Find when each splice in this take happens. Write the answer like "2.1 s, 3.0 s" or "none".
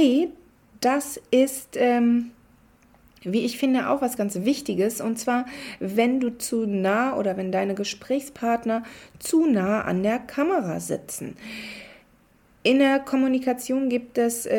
4.2 s